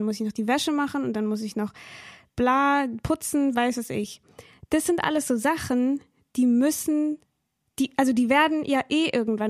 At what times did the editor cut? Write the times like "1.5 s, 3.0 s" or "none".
none